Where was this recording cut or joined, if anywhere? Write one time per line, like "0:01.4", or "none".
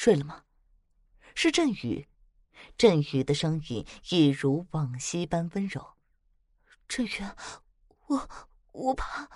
none